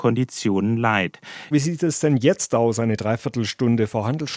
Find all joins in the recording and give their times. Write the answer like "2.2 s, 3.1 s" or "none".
1.5 s